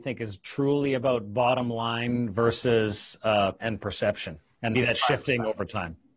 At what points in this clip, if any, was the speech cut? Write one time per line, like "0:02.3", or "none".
0:03.6
0:04.7

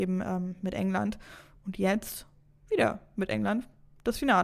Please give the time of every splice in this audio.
none

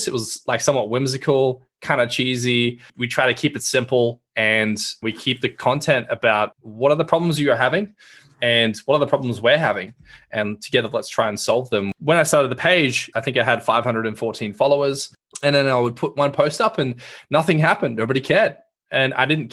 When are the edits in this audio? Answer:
none

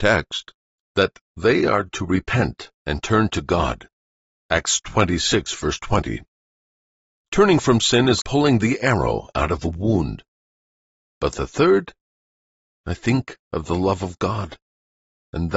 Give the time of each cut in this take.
0:08.2
0:11.1

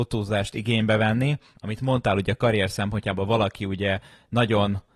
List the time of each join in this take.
0:01.6

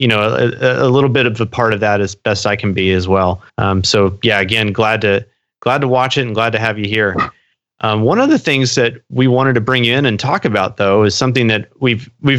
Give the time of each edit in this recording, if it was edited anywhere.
0:03.5

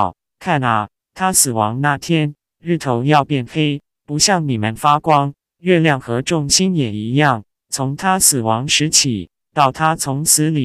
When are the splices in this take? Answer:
none

